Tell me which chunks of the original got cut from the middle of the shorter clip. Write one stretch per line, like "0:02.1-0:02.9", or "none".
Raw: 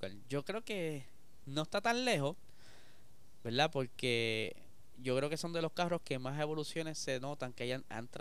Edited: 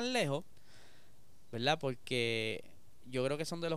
none